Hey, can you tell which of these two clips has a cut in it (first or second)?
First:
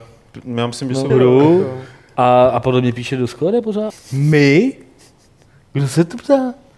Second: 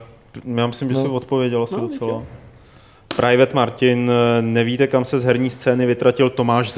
first